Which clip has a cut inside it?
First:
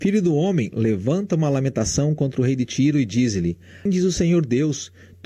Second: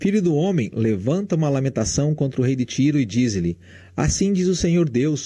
first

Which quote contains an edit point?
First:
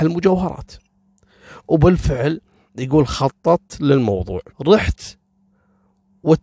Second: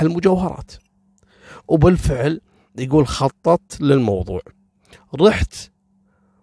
first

